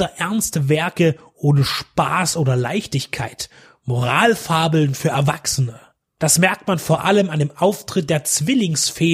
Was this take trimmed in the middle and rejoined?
yes; 1 cut; at 6.2 s

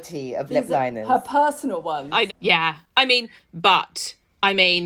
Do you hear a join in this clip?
yes; 2 cuts; at 2.3 s, 3.4 s

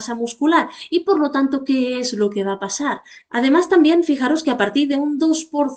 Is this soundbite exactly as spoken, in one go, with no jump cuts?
no; 1 cut; at 3.3 s

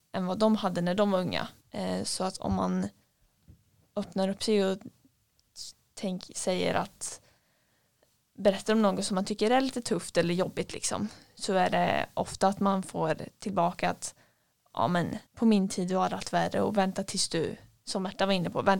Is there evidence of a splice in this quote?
yes; 2 cuts; at 1.6 s, 15.3 s

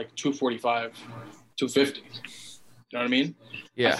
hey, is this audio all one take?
yes; 0 cuts

